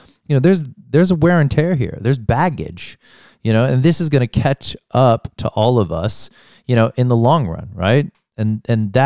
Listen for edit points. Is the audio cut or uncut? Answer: uncut